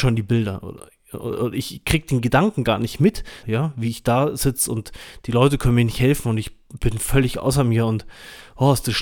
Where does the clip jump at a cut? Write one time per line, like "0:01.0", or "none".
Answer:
0:03.4